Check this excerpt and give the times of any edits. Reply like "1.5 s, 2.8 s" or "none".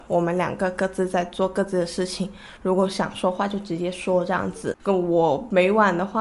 none